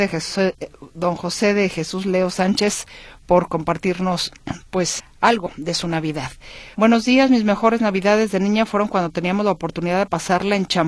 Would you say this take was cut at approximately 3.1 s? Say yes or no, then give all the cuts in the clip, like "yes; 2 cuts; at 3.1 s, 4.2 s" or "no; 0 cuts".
no; 2 cuts; at 5.0 s, 6.7 s